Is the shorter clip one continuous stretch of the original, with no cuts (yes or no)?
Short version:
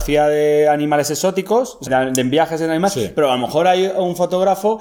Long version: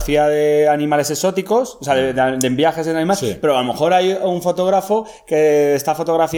no